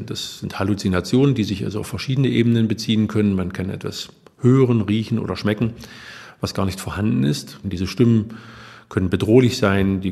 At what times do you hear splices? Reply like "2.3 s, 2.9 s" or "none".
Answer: 7.6 s

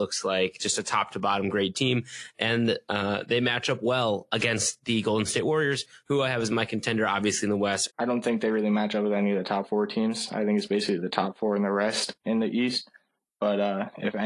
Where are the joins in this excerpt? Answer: 7.9 s

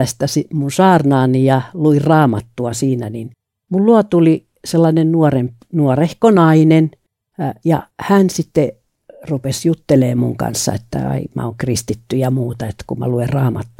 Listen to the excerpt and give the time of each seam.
7.9 s

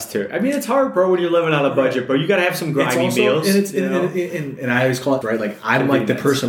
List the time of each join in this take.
5.2 s

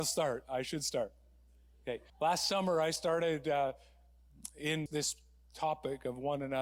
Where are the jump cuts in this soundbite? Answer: 2.1 s, 4.9 s

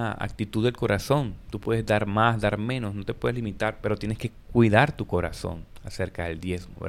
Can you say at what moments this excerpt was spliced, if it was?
none

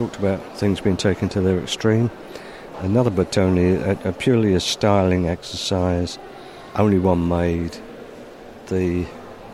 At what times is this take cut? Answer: 2.7 s

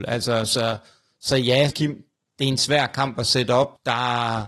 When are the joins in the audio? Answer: 1.7 s

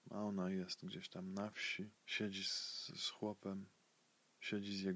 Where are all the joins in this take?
2.0 s

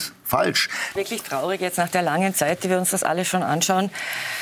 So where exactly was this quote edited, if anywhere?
1.0 s

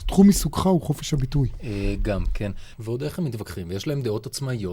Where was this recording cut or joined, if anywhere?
2.7 s

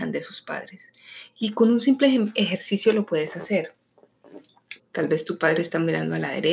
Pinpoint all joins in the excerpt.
1.3 s, 4.8 s

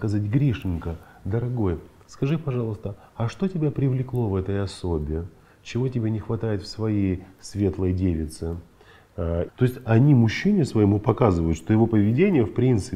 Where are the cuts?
9.5 s

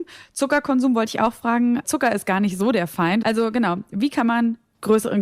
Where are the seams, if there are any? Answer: 1.8 s, 3.2 s

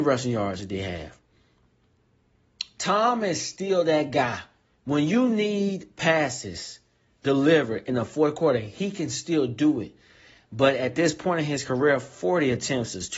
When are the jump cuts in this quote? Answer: 2.8 s

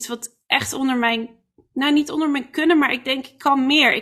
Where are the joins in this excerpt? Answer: none

